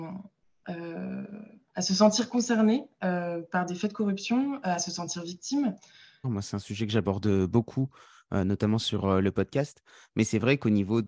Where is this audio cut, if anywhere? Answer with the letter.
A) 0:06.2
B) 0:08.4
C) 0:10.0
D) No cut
A